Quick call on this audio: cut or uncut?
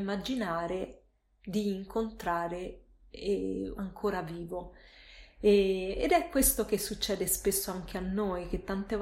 cut